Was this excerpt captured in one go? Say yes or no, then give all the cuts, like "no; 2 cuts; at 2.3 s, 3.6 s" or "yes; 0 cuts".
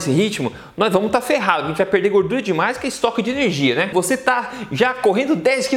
no; 1 cut; at 3.9 s